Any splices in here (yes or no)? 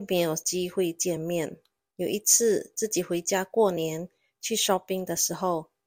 no